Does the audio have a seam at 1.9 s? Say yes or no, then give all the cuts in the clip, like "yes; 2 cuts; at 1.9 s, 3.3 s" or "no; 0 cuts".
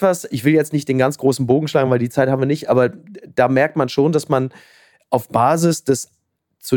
no; 0 cuts